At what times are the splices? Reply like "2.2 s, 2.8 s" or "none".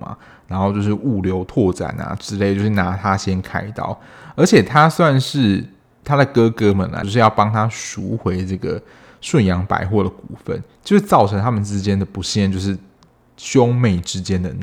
7.0 s